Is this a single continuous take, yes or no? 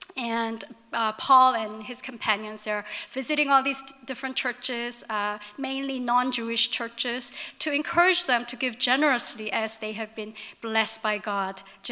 yes